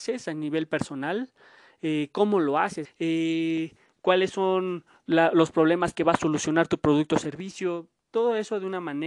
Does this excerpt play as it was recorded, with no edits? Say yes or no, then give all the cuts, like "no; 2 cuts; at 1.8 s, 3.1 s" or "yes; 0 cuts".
no; 1 cut; at 2.8 s